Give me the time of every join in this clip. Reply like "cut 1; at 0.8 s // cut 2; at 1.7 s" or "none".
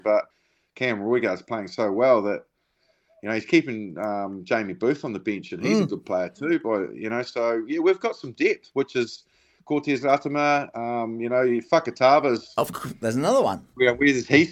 none

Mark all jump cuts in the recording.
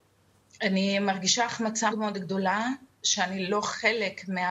cut 1; at 1.9 s

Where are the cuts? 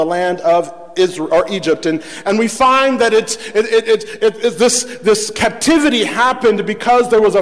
none

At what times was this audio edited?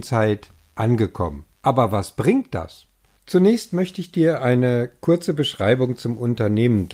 cut 1; at 1.6 s // cut 2; at 3.2 s

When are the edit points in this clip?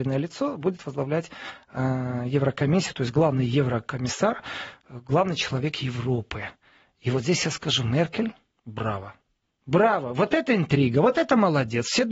none

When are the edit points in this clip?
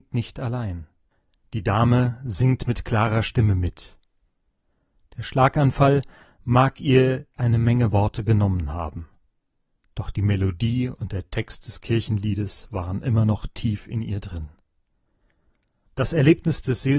cut 1; at 15.9 s

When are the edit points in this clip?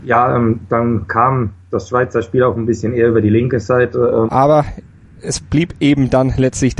cut 1; at 4.3 s

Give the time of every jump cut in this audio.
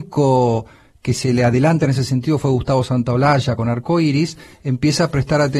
none

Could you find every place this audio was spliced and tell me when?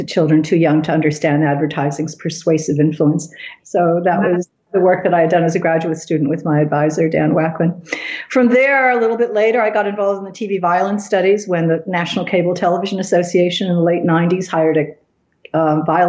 cut 1; at 3.6 s

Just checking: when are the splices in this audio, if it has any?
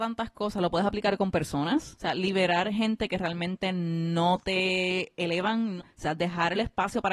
cut 1; at 5.8 s

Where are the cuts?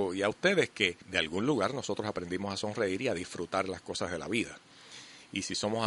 cut 1; at 1.0 s

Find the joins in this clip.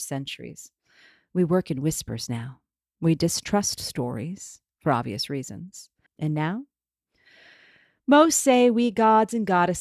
cut 1; at 6.1 s

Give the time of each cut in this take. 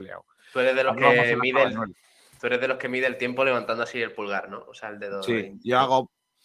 none

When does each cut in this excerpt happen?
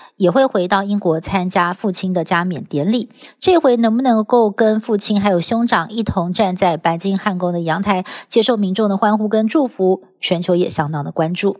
none

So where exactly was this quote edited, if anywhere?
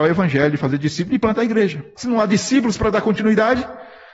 cut 1; at 2.0 s

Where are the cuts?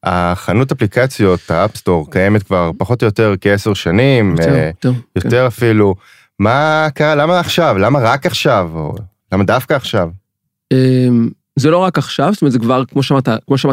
none

